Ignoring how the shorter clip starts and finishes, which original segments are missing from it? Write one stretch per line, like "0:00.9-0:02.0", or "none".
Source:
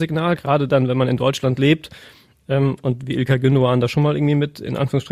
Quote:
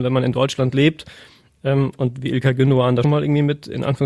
0:03.9-0:04.0